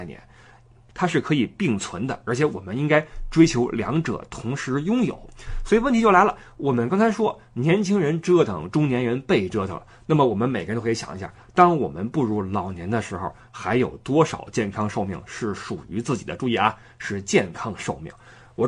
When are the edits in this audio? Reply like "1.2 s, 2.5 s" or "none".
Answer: none